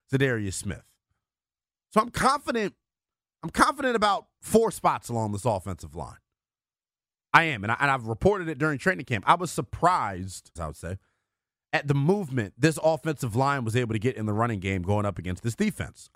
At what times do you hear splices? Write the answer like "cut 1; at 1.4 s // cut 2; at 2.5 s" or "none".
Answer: cut 1; at 10.6 s